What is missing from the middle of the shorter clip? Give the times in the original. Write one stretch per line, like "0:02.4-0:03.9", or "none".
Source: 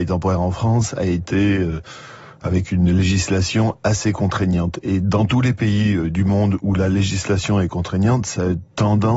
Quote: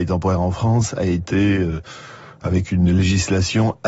none